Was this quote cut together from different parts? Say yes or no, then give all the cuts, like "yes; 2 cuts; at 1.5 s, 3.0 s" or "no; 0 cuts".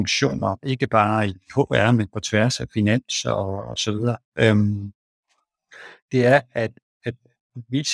no; 0 cuts